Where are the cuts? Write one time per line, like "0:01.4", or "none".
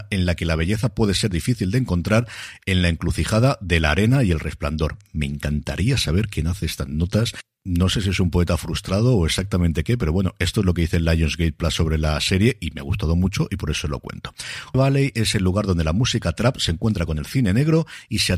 0:14.7